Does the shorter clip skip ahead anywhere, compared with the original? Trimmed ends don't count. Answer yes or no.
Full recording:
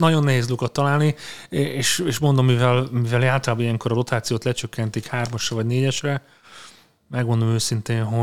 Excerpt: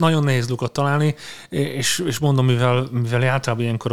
no